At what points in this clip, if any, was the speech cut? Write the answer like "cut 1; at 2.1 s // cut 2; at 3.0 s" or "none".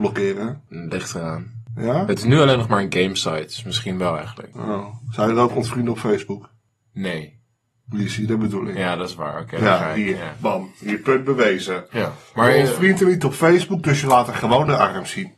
none